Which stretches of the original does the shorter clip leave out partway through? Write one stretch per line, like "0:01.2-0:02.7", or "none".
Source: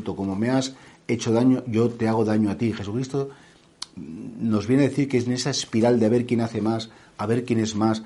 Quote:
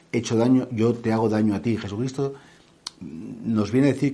none